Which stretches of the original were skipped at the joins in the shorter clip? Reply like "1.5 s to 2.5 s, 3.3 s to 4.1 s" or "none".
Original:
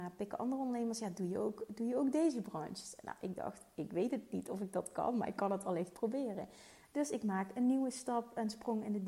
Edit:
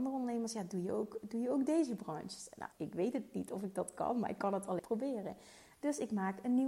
3.2 s to 3.7 s, 5.8 s to 5.9 s

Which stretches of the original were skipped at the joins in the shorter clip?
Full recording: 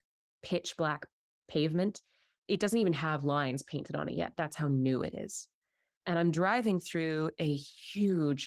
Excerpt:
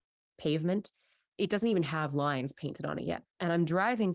4.3 s to 5.9 s

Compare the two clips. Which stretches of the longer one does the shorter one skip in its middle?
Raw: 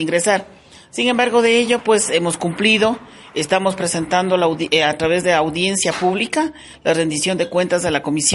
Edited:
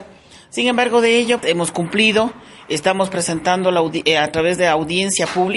1.8 s to 2.1 s

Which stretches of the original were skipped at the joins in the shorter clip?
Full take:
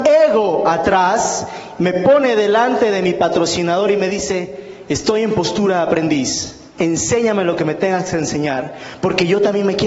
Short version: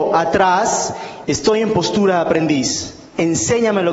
1.8 s to 4.9 s

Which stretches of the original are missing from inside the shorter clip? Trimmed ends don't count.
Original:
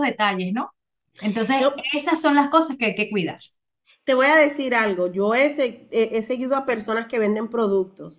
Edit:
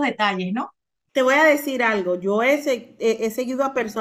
1.1 s to 4.0 s

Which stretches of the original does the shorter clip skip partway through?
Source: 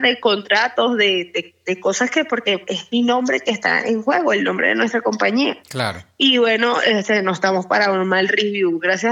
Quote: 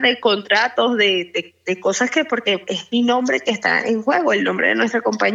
none

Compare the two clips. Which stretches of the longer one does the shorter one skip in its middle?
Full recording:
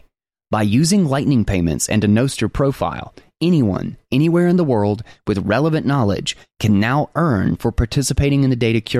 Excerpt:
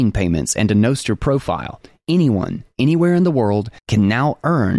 5.1 s to 6.5 s

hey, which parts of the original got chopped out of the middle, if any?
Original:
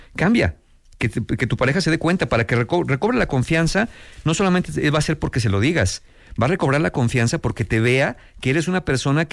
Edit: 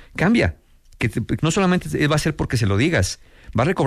1.4 s to 4.2 s

